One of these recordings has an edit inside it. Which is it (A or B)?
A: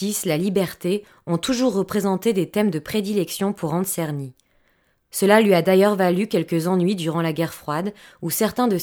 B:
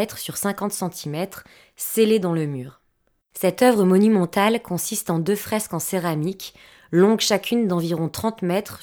B